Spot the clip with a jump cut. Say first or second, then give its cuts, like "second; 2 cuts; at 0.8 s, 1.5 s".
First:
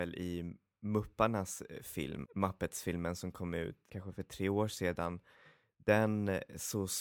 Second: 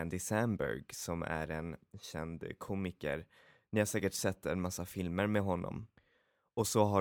first; 2 cuts; at 2.2 s, 3.9 s